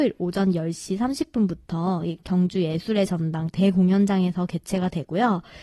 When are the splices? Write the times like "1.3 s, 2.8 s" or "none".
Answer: none